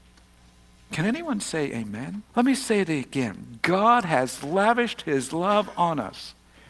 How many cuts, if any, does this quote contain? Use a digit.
1